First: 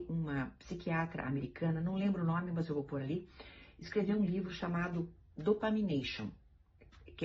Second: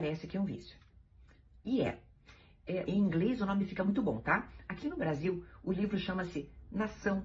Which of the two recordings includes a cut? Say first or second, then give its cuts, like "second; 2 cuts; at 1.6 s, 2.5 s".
second; 1 cut; at 2.9 s